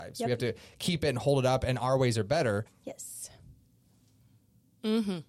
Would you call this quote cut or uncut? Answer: cut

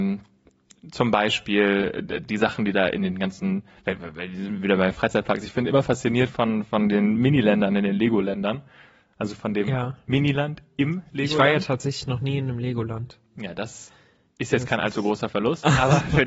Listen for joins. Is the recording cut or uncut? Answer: uncut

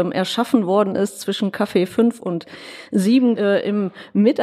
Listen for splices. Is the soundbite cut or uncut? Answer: cut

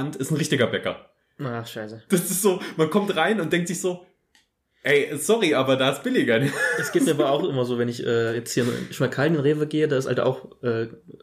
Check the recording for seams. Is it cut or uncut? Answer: uncut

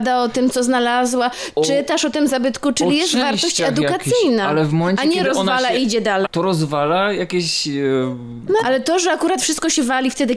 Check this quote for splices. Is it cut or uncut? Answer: cut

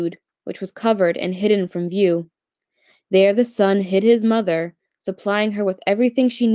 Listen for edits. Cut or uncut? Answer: uncut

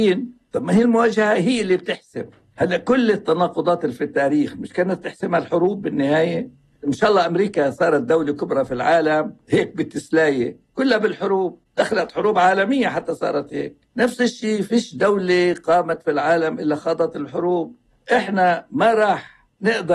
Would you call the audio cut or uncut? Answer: cut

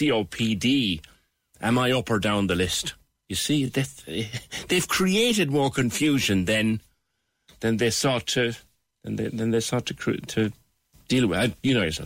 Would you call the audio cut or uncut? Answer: uncut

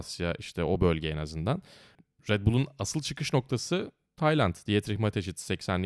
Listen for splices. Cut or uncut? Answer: uncut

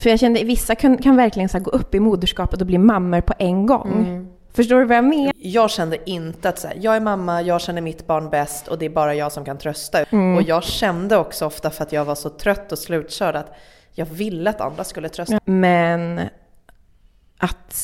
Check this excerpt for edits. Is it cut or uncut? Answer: cut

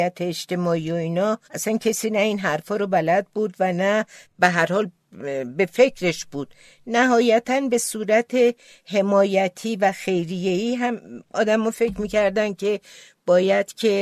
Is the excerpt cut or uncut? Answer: cut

